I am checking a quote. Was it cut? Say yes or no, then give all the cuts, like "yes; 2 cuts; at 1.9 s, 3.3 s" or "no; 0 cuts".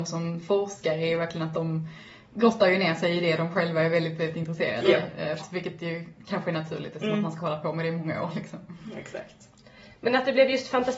yes; 1 cut; at 5.4 s